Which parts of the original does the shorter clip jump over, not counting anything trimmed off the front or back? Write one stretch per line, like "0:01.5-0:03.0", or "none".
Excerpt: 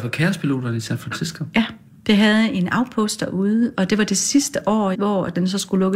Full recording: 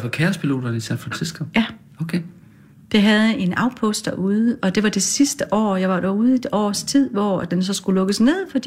0:01.9-0:02.7
0:05.8-0:07.1